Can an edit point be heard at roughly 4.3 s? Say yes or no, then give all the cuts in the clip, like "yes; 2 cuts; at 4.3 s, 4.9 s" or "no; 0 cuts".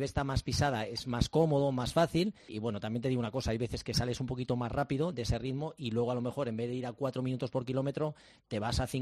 no; 1 cut; at 2.5 s